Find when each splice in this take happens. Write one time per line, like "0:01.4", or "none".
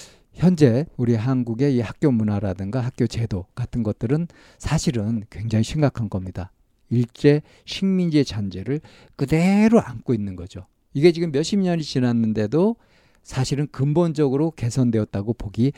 none